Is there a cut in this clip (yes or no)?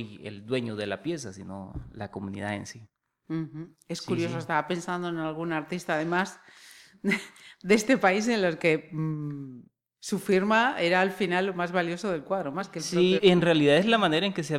yes